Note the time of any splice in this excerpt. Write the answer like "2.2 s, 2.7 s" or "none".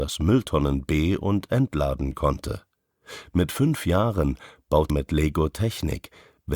4.9 s